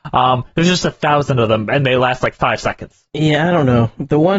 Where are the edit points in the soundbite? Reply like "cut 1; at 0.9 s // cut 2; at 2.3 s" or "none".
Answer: none